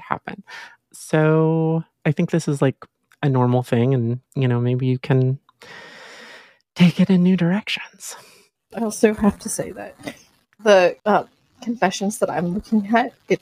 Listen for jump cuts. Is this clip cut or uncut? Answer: cut